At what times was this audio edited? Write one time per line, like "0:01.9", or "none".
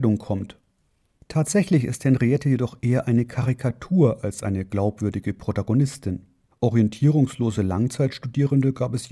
0:06.6